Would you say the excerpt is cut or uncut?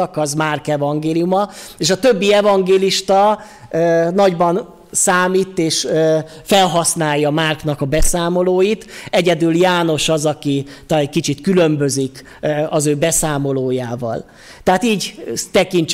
uncut